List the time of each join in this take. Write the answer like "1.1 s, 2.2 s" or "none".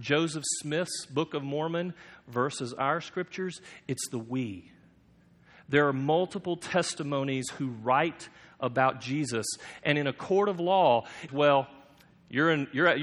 11.3 s

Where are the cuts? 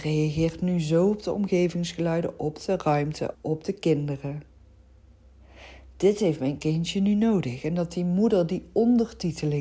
3.3 s

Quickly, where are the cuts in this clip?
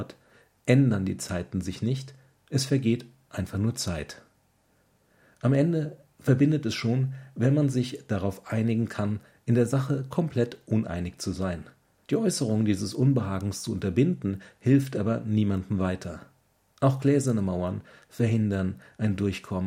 12.0 s

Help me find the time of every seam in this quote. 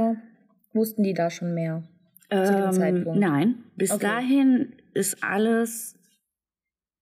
none

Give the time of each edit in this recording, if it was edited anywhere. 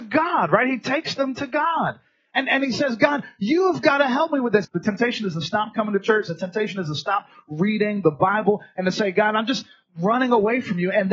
4.6 s

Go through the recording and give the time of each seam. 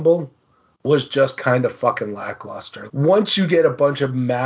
2.9 s

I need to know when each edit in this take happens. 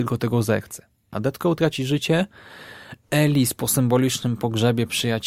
1.1 s

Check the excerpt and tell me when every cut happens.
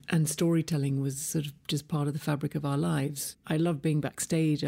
3.3 s

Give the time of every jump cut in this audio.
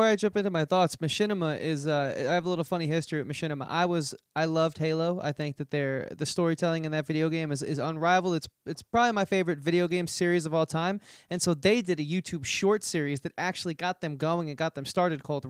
none

